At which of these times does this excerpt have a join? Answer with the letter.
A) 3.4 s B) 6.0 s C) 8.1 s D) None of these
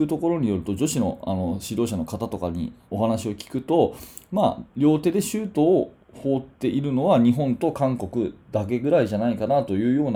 B